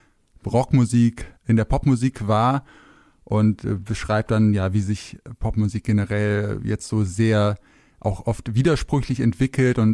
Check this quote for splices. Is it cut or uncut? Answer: uncut